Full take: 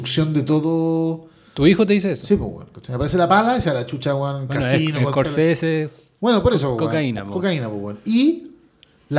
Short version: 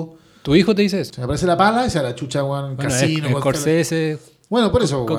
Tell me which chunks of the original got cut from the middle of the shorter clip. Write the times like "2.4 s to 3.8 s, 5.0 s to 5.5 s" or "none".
2.2 s to 2.8 s